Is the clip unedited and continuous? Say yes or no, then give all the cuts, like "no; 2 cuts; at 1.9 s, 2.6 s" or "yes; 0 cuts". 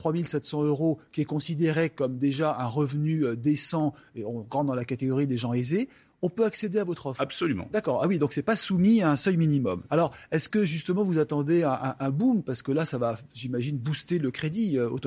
no; 1 cut; at 9.9 s